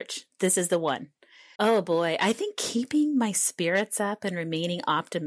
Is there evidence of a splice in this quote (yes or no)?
yes